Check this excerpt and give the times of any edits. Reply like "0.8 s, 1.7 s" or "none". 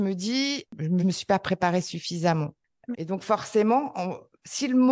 1.0 s, 2.9 s